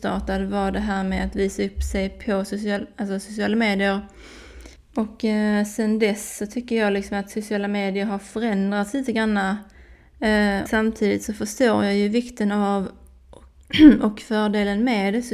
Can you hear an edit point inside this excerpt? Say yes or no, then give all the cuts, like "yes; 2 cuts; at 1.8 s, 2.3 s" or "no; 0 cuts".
yes; 2 cuts; at 4.7 s, 10.7 s